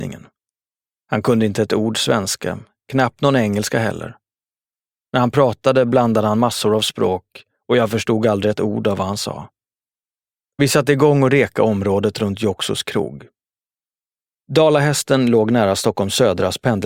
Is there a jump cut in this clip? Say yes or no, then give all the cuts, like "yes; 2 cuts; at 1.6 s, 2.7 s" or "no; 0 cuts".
no; 0 cuts